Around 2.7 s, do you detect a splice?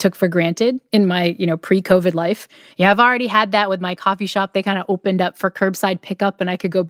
yes; 1 cut; at 2.7 s

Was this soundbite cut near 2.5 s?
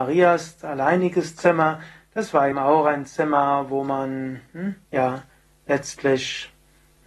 yes; 2 cuts; at 2.5 s, 4.8 s

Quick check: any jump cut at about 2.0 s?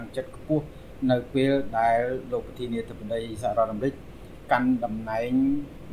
no; 0 cuts

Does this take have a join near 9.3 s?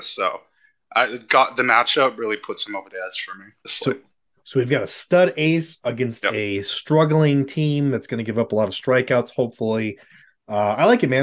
no; 1 cut; at 3.6 s

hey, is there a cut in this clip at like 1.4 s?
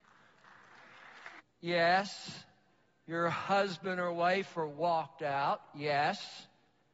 yes; 1 cut; at 1.4 s

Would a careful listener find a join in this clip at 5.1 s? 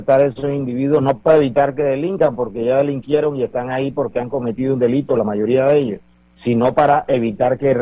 no; 1 cut; at 6.3 s

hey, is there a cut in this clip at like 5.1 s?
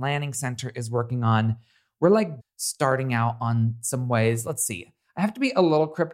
no; 1 cut; at 2.4 s

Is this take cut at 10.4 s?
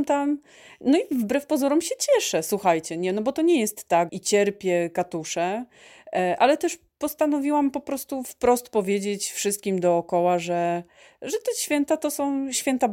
no; 1 cut; at 4.1 s

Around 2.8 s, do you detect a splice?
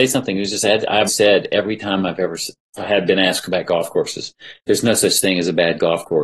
no; 2 cuts; at 1.1 s, 4.6 s

